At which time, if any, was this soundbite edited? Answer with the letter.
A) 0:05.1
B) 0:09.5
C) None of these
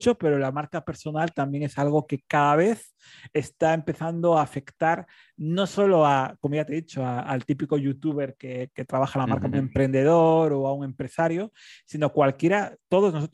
B